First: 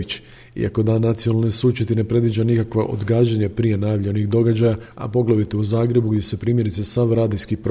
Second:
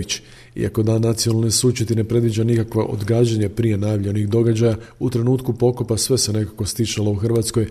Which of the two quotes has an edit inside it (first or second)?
first